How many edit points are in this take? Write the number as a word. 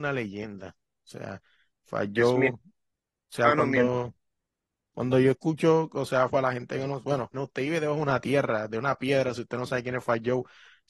two